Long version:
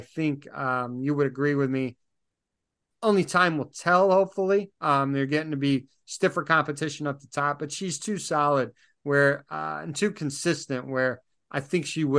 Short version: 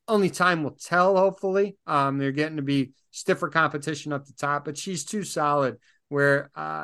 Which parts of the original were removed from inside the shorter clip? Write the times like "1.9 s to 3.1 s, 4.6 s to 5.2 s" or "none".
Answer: none